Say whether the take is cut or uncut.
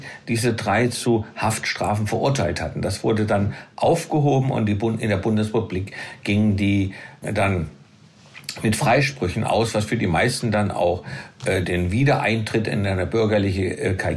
cut